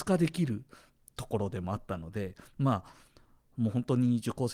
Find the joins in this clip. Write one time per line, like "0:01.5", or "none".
none